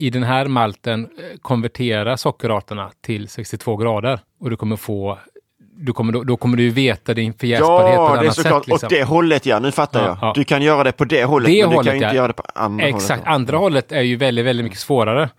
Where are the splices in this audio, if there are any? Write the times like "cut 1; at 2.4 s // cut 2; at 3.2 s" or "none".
cut 1; at 4.3 s